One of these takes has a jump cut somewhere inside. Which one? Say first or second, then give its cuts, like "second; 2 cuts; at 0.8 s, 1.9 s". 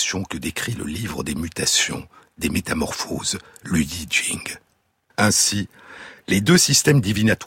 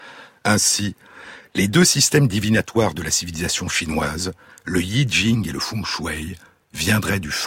first; 1 cut; at 5.1 s